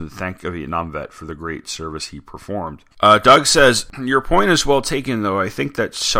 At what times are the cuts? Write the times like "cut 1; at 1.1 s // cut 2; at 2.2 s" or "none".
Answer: cut 1; at 2.9 s